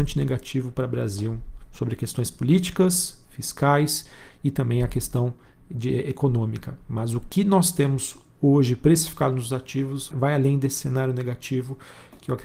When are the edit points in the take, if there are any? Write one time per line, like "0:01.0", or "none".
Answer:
0:10.1